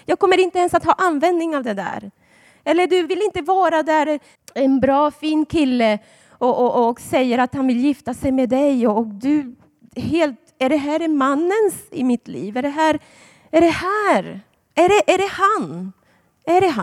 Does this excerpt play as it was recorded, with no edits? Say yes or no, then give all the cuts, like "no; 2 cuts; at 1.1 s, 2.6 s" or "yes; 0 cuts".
no; 1 cut; at 4.4 s